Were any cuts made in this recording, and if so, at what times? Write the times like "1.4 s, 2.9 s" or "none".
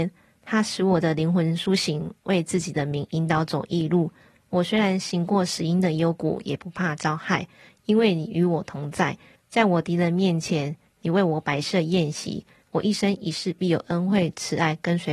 9.4 s, 12.6 s